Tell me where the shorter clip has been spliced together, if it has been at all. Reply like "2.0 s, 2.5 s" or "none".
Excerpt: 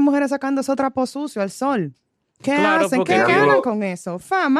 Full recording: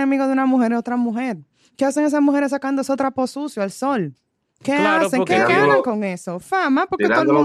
none